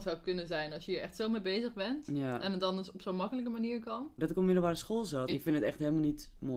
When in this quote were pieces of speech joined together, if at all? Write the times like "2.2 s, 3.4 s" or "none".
4.2 s, 5.3 s